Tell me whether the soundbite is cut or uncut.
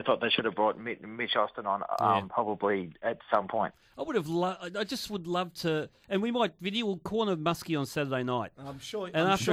uncut